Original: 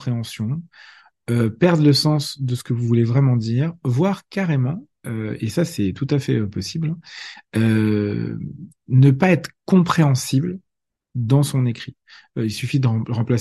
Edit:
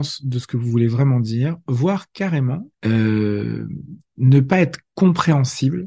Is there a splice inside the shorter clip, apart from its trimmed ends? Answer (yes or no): yes